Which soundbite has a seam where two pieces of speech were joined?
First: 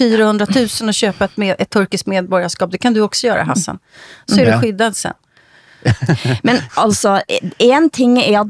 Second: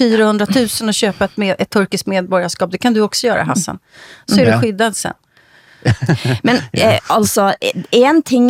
first; 1 cut; at 6.7 s

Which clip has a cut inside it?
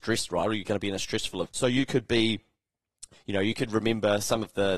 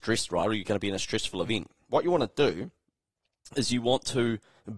first; 2 cuts; at 1.5 s, 3.1 s

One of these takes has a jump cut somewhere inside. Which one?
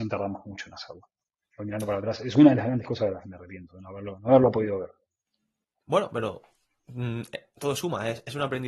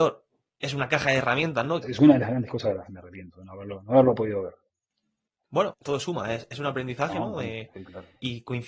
second; 2 cuts; at 1.8 s, 5.7 s

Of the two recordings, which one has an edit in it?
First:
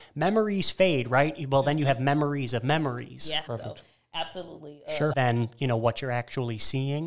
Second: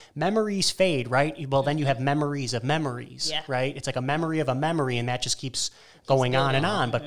first; 2 cuts; at 3.5 s, 5.1 s

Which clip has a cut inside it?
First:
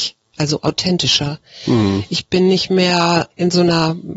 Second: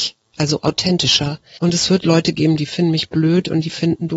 second; 1 cut; at 1.6 s

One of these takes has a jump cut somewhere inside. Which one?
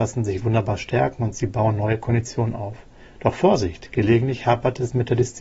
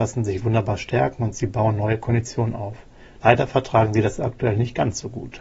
second; 1 cut; at 3.2 s

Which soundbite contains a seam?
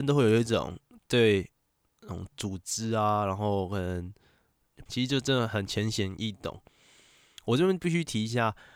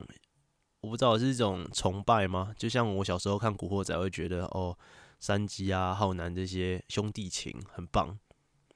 first; 1 cut; at 4.9 s

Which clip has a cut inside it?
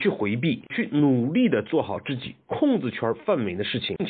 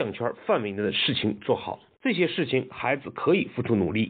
second; 1 cut; at 1.9 s

